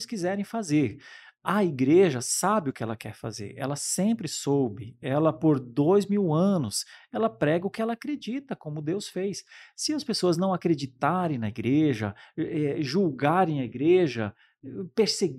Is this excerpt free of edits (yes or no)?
yes